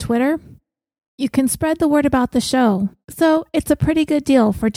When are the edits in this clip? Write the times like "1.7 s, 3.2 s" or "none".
3.0 s